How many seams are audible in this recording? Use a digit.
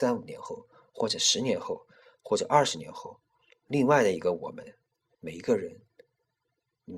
1